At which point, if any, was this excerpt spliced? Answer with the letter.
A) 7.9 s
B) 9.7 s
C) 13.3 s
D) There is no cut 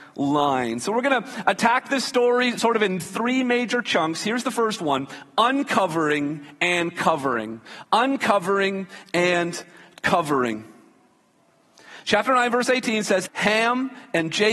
C